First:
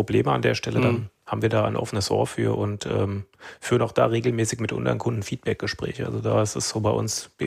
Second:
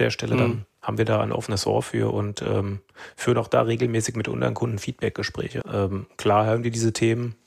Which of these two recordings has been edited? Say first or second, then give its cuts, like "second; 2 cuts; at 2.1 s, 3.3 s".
second; 1 cut; at 5.6 s